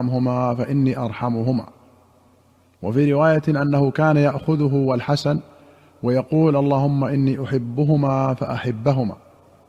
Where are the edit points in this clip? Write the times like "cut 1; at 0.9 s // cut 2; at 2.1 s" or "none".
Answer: none